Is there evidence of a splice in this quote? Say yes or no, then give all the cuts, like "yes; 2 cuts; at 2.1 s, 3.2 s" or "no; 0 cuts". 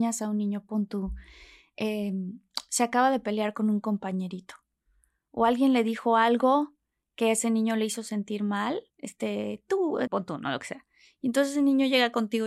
yes; 2 cuts; at 8.9 s, 10.1 s